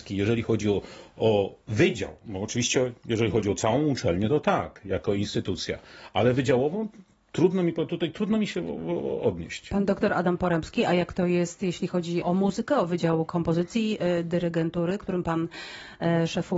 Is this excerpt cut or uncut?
cut